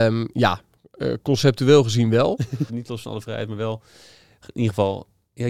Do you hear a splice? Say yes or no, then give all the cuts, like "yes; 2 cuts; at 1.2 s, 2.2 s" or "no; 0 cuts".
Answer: yes; 1 cut; at 2.7 s